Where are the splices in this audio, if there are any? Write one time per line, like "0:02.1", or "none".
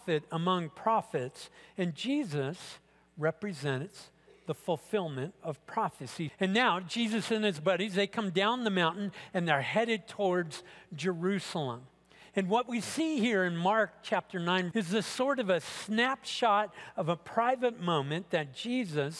0:06.3
0:14.7